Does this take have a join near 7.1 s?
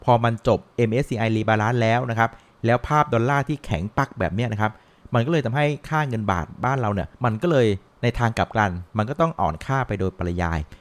yes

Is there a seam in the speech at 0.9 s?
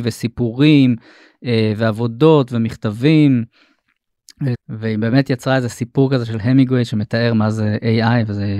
no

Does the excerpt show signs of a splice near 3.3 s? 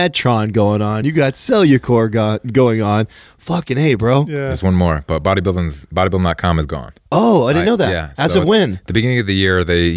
no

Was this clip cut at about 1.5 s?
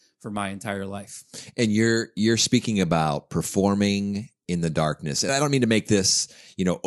no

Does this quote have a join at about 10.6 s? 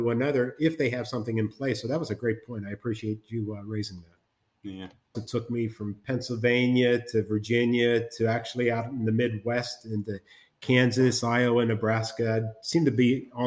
no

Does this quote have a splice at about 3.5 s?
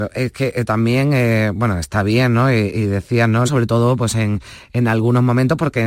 yes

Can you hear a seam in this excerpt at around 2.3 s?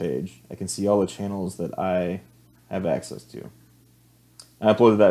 no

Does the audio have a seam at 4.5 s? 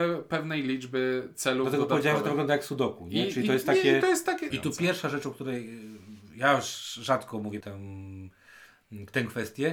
yes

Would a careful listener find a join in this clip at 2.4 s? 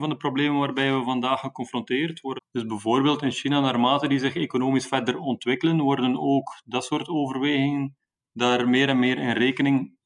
yes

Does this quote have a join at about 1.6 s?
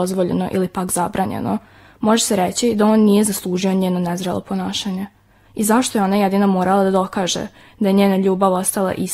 no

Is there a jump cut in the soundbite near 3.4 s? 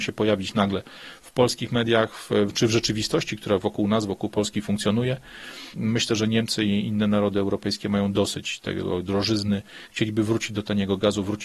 no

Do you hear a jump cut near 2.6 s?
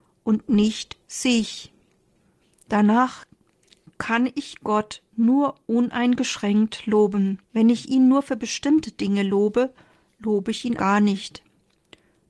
yes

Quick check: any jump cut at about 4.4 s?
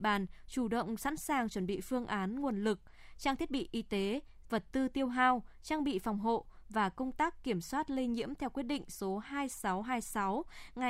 yes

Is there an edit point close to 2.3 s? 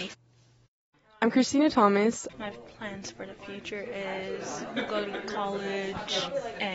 yes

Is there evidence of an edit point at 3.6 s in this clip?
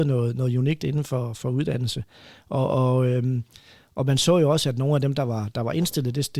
no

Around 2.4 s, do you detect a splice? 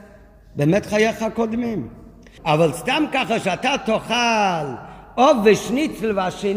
yes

